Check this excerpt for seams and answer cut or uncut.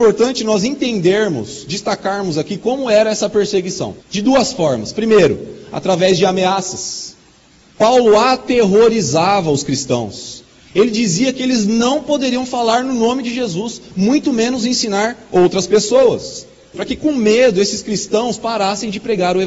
cut